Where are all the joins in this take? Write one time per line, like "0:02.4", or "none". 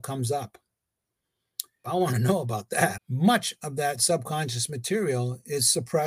0:01.8
0:03.0